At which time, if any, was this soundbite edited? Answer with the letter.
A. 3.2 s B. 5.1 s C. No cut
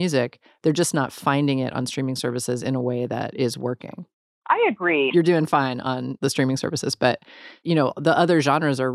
B